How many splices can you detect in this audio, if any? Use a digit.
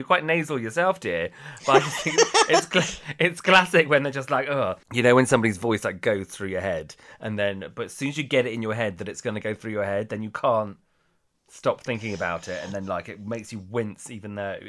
0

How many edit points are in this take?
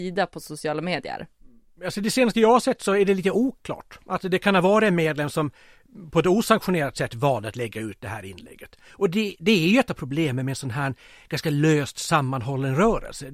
0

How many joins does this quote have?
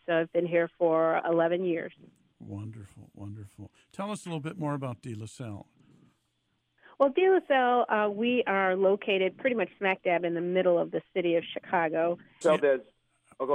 1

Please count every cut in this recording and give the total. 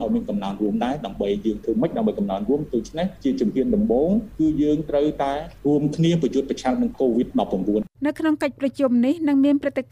1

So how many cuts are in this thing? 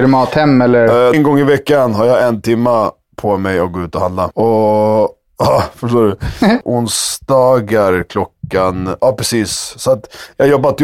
2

